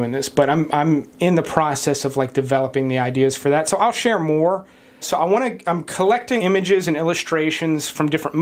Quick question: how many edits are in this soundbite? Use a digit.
2